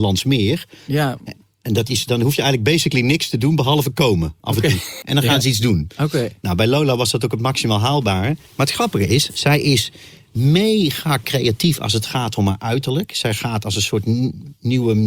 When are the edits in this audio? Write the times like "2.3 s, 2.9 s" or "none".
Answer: 5.0 s